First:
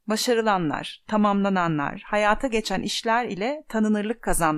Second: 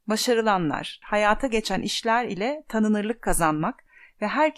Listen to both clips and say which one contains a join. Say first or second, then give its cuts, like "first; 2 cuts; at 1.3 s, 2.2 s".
second; 1 cut; at 1.0 s